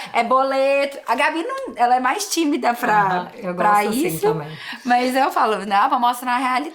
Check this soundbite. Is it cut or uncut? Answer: uncut